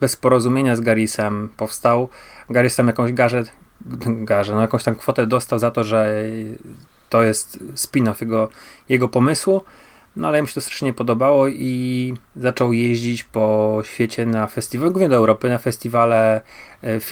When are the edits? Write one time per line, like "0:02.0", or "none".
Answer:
0:12.3